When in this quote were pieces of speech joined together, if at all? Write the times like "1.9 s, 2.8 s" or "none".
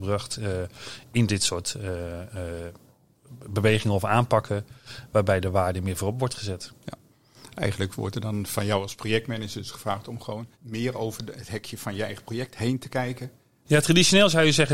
10.5 s, 13.6 s

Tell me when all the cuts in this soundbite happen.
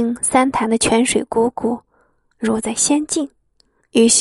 none

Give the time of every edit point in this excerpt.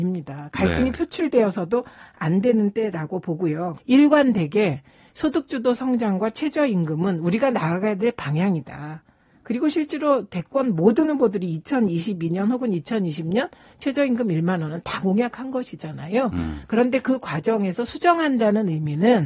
3.8 s

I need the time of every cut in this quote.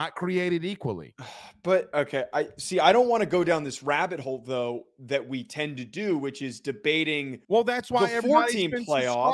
7.4 s

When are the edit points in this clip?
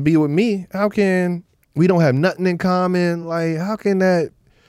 none

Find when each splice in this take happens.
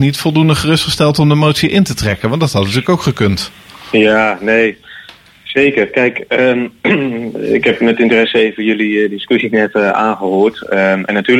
none

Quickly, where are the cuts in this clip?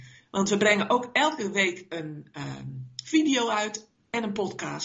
none

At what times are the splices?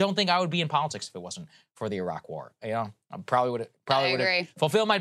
none

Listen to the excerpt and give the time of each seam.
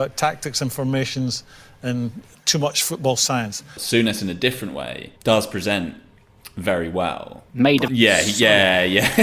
3.8 s, 7.9 s

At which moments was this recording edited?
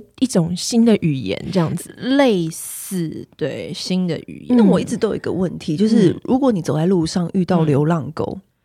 none

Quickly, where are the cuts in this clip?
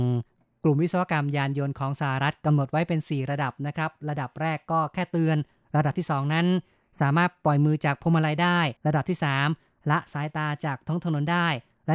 8.8 s

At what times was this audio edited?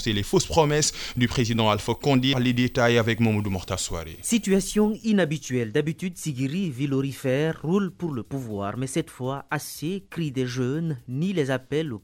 2.3 s

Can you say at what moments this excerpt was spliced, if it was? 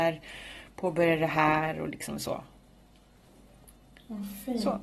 none

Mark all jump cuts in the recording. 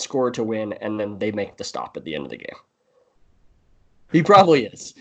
4.1 s

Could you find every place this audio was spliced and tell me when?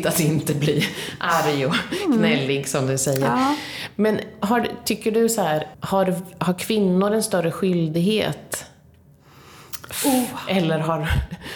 5.7 s

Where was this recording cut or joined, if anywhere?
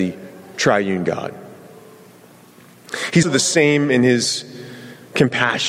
3.2 s

